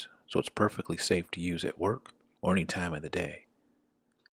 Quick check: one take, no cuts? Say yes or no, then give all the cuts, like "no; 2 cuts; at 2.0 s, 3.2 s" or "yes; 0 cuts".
no; 1 cut; at 2.4 s